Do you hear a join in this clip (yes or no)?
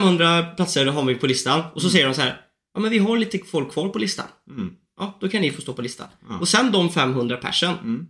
no